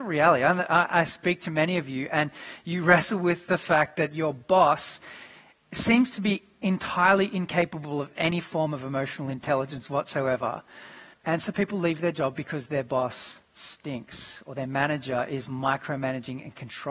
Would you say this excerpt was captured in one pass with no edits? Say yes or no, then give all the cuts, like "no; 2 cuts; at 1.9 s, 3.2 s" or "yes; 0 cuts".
no; 1 cut; at 11.1 s